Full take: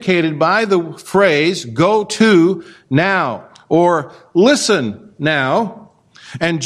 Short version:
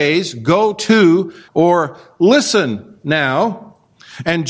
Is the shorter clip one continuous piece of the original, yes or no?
no